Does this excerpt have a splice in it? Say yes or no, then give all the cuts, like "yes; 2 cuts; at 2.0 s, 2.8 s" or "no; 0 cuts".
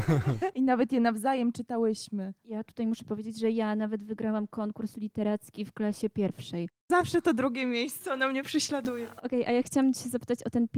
yes; 1 cut; at 6.8 s